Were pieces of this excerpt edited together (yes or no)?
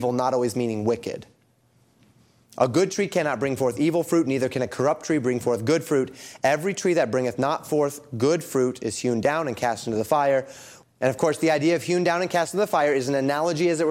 yes